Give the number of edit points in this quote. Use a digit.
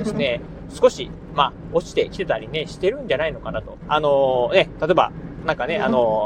1